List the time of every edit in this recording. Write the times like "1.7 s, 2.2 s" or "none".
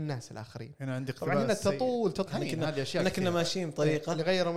2.3 s